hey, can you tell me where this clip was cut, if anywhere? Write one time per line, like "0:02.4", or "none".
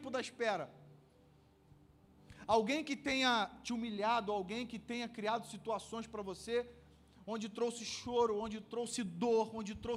0:02.5